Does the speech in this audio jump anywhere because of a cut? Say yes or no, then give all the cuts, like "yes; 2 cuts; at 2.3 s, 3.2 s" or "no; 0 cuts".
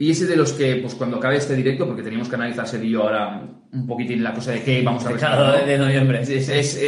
no; 0 cuts